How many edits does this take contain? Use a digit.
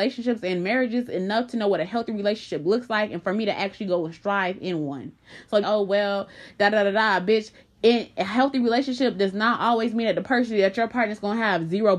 1